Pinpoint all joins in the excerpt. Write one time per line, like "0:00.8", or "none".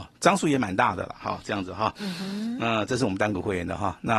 none